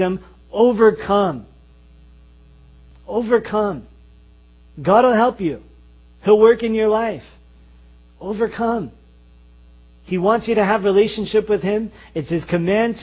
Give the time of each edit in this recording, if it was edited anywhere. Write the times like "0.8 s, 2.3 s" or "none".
none